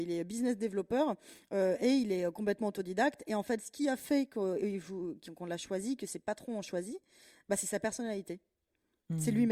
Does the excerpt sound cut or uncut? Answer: uncut